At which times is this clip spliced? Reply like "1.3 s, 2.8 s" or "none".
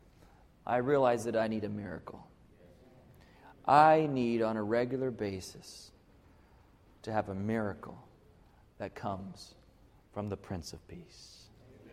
none